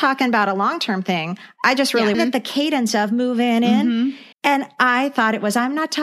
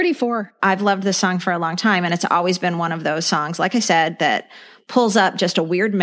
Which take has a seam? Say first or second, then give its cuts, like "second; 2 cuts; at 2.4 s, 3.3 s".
first; 2 cuts; at 2.1 s, 4.3 s